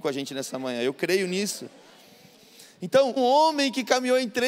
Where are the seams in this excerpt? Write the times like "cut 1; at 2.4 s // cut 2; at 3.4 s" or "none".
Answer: cut 1; at 3.2 s